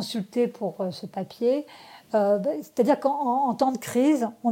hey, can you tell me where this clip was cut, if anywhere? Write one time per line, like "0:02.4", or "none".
none